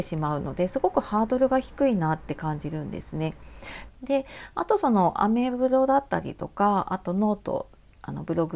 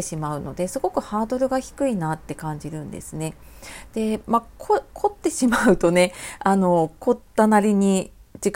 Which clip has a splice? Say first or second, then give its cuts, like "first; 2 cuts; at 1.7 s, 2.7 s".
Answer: first; 1 cut; at 3.9 s